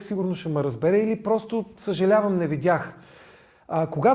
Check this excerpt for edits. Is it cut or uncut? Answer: uncut